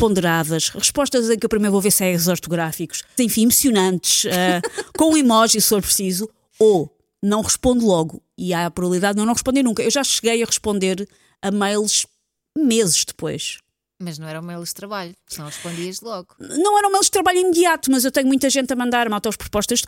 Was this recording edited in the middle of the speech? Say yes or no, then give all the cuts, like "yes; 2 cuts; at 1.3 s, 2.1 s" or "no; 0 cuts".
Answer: yes; 1 cut; at 3.2 s